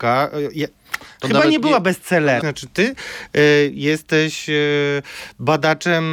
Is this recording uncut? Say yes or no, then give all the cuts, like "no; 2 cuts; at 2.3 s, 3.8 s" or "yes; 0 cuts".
no; 1 cut; at 2.4 s